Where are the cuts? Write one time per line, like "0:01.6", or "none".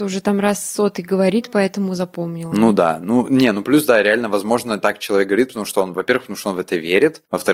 none